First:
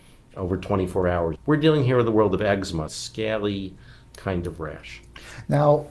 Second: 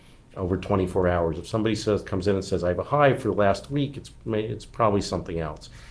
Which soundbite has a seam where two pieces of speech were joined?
first; 2 cuts; at 1.3 s, 2.9 s

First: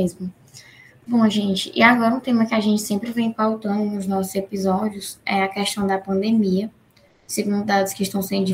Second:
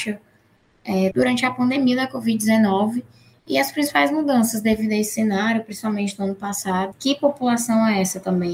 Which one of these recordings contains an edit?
second; 2 cuts; at 1.1 s, 6.9 s

